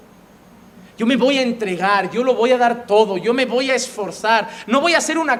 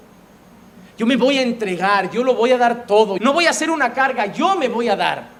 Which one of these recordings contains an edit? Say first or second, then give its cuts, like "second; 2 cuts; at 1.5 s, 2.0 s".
second; 1 cut; at 3.2 s